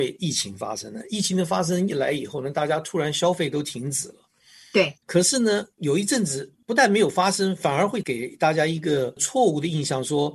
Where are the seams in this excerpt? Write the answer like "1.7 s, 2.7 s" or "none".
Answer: 5.0 s